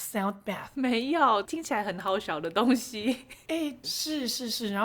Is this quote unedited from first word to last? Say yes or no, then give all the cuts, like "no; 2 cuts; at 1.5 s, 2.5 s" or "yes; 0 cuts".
no; 2 cuts; at 1.4 s, 3.8 s